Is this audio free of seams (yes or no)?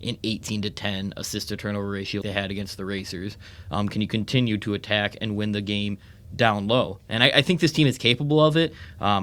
no